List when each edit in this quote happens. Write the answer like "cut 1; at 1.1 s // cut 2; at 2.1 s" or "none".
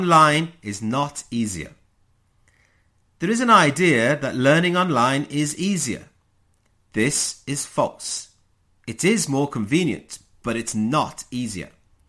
none